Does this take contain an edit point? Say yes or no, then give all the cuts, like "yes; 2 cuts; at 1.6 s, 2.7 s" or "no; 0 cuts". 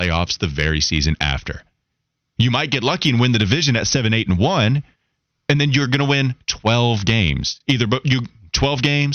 no; 0 cuts